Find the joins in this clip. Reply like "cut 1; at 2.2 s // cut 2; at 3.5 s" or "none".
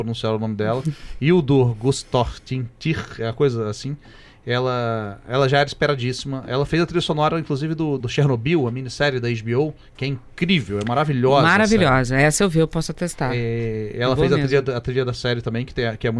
cut 1; at 8.0 s